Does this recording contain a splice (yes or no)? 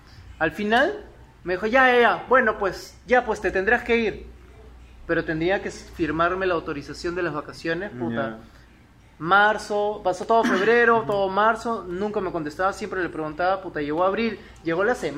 no